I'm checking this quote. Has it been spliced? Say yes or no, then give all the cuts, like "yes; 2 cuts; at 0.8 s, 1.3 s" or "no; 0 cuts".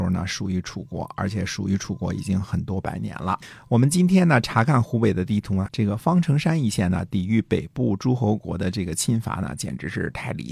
yes; 1 cut; at 5.7 s